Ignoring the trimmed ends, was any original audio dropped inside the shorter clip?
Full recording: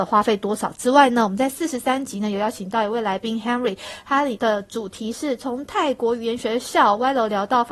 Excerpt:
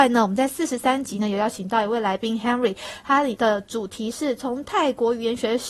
no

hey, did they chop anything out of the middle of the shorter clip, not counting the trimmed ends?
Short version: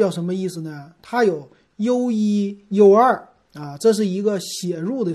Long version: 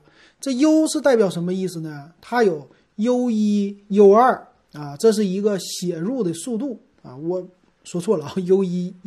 no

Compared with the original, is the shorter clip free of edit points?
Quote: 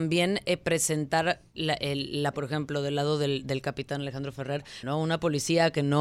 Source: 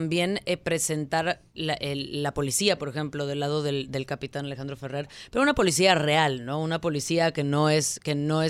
no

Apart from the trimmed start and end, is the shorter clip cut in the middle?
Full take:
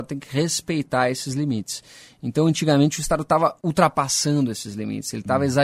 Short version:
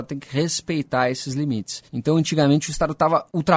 yes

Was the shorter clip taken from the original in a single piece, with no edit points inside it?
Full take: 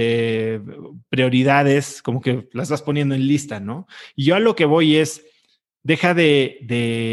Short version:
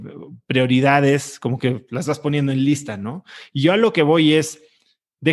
yes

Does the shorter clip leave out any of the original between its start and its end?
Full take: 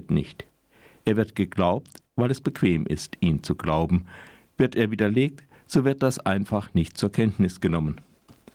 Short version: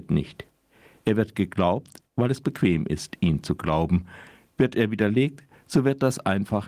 no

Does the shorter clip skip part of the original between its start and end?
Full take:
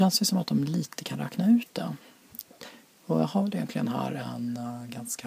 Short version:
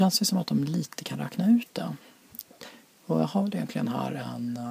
no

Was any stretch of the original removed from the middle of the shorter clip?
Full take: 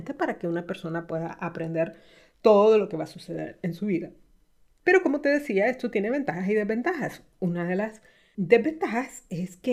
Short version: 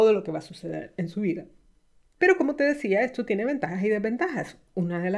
no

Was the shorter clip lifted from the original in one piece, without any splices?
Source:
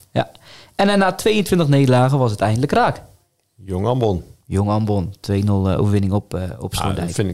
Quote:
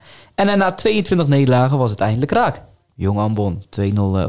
no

